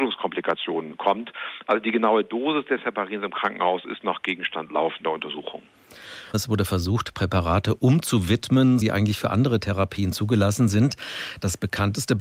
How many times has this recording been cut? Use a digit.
2